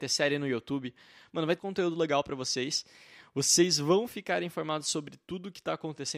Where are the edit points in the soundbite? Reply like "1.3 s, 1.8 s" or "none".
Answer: 1.6 s